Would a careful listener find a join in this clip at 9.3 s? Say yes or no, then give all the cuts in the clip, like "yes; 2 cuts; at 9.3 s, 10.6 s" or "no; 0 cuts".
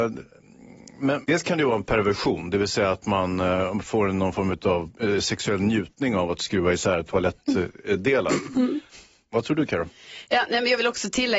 yes; 2 cuts; at 1.2 s, 9.3 s